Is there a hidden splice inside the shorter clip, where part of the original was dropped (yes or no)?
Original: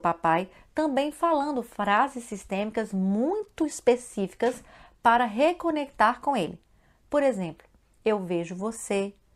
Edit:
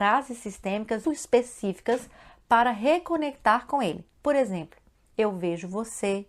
yes